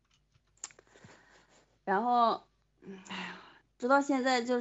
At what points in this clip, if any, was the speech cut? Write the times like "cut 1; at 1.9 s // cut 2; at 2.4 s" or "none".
none